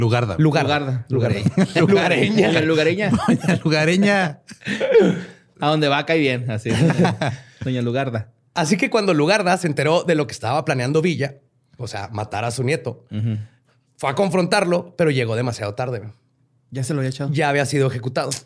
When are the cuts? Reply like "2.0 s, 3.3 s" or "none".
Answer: none